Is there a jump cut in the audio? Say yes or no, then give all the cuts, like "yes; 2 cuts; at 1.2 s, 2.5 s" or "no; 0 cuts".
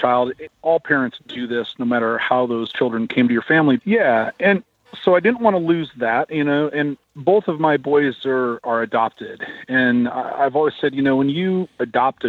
yes; 1 cut; at 3.8 s